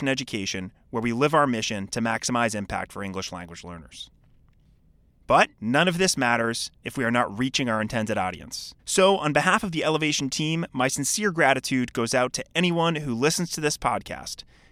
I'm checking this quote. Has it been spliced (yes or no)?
yes